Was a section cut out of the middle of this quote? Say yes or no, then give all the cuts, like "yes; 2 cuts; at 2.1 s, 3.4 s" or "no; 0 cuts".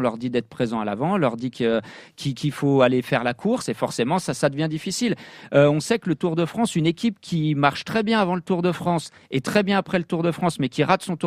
no; 0 cuts